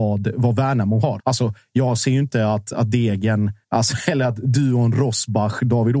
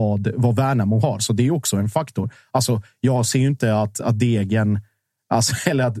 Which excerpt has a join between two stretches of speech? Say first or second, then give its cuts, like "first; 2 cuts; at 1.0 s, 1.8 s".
first; 2 cuts; at 1.2 s, 3.6 s